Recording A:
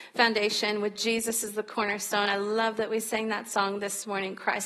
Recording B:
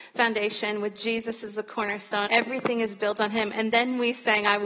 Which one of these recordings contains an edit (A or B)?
B